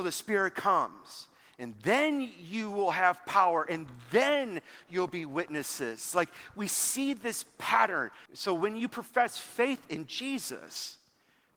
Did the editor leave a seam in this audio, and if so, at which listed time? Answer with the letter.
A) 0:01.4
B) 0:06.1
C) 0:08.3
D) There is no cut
C